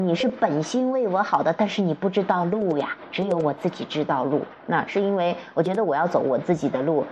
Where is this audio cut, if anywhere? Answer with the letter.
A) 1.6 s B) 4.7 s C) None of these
B